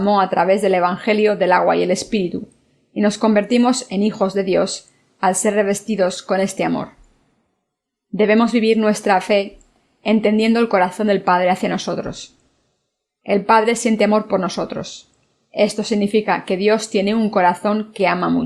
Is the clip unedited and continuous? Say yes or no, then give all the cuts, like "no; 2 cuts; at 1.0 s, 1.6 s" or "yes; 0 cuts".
yes; 0 cuts